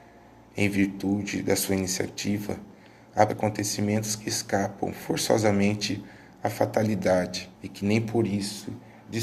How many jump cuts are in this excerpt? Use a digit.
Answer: 2